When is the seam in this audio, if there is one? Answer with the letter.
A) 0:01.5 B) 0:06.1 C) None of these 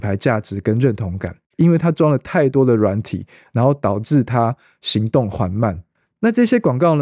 A